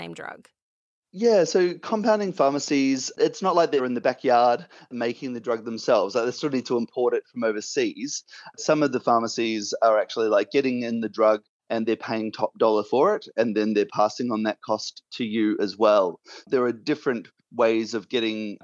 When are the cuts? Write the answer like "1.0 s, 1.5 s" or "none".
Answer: none